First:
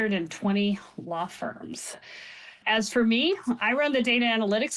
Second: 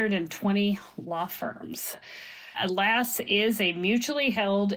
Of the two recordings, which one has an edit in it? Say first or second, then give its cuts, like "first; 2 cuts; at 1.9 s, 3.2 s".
second; 1 cut; at 2.5 s